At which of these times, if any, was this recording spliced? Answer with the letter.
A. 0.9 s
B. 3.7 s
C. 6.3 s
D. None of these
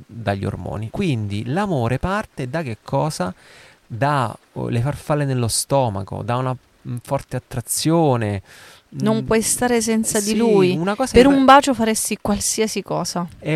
A